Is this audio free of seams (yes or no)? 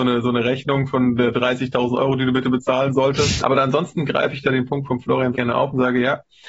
no